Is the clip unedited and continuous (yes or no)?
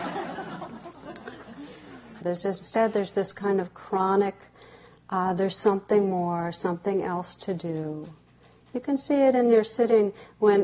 no